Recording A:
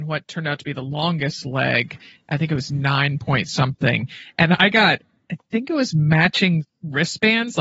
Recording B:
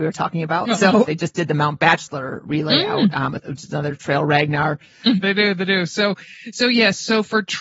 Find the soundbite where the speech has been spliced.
B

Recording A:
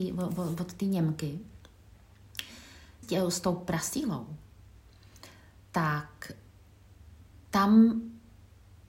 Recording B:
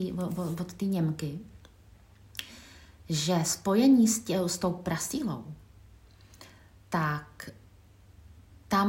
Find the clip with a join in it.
A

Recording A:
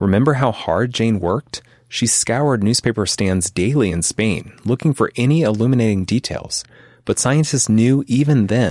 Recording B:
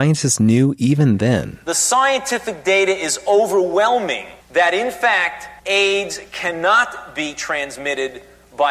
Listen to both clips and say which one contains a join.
B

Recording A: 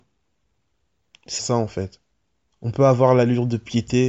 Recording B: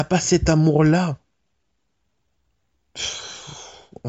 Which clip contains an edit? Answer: A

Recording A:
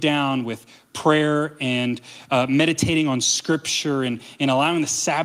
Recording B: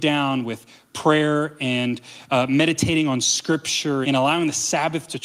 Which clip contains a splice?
B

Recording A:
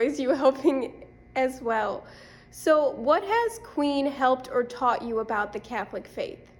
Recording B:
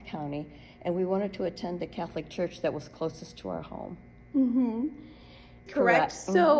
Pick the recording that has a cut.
B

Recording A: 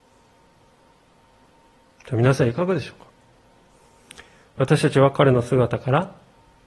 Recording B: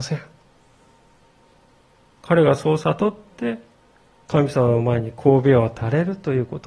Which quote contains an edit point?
B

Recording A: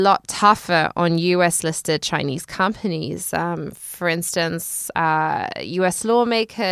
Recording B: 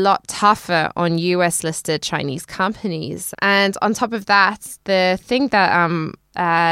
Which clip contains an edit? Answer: B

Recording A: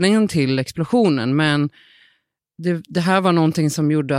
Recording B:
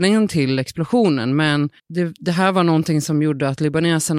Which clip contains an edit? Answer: B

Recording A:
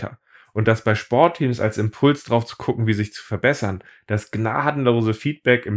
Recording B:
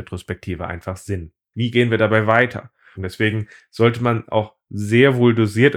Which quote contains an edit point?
B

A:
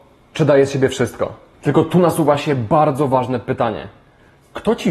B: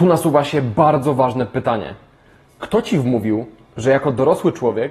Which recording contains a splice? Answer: A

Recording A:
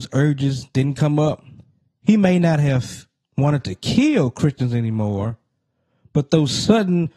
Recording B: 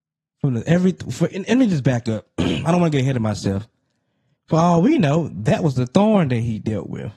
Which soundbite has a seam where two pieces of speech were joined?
B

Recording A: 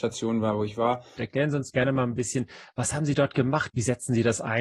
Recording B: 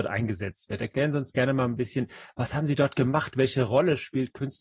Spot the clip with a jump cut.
A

